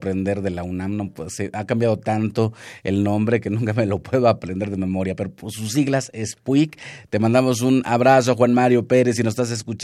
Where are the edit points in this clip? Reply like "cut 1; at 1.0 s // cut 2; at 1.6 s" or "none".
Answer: none